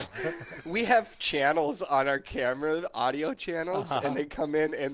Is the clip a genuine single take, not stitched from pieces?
yes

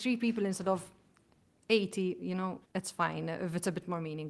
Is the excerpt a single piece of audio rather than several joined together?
no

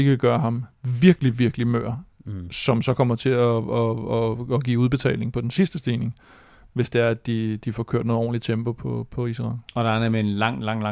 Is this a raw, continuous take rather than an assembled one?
yes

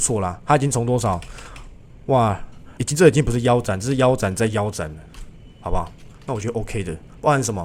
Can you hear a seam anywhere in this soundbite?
yes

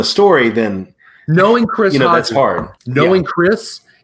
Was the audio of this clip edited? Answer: yes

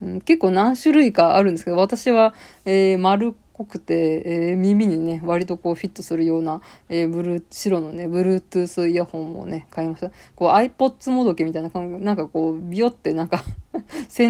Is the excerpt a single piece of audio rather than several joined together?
yes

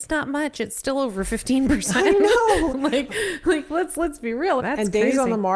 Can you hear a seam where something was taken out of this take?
yes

